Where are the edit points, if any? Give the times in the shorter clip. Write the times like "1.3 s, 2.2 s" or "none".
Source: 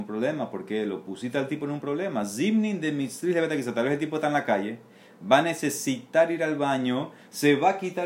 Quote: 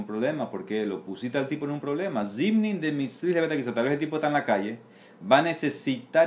none